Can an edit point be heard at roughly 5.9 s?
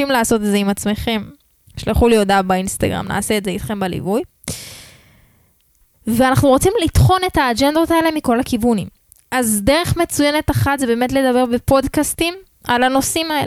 yes; 1 cut; at 5.9 s

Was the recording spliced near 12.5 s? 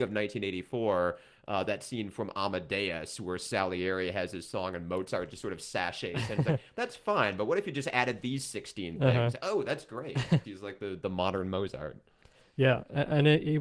no; 1 cut; at 10.4 s

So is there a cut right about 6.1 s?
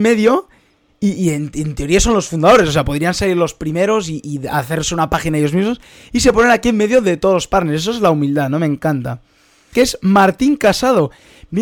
no; 1 cut; at 9.7 s

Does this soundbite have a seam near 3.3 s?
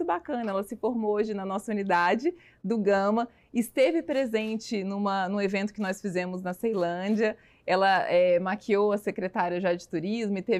no; 0 cuts

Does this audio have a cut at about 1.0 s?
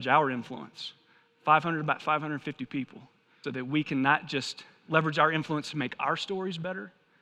no; 1 cut; at 3.4 s

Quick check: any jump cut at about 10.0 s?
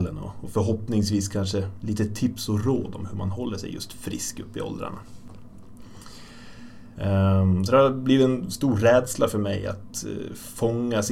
no; 1 cut; at 6.9 s

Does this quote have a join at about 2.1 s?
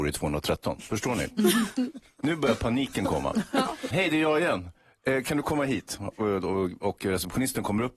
no; 1 cut; at 3.9 s

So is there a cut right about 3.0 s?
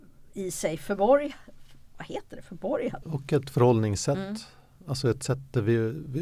yes; 1 cut; at 3.0 s

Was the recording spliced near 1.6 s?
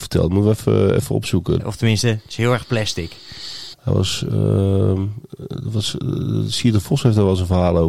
yes; 2 cuts; at 1.6 s, 3.7 s

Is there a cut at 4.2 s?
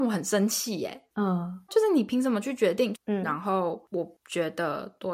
no; 2 cuts; at 1.7 s, 2.9 s

